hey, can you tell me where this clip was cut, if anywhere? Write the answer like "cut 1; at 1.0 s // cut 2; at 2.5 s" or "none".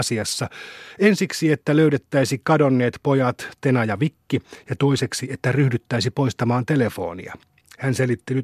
none